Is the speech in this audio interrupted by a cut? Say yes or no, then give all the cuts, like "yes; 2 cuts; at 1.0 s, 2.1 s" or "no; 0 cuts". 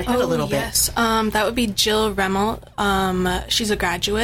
no; 0 cuts